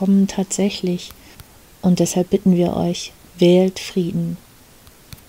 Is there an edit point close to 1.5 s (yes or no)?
no